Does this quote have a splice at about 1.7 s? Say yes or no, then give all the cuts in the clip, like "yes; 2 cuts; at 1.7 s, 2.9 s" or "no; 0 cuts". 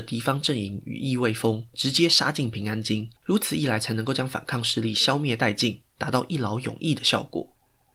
yes; 2 cuts; at 1.7 s, 3.2 s